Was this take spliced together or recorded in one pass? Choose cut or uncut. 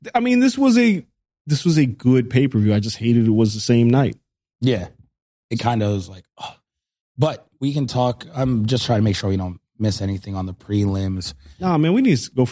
uncut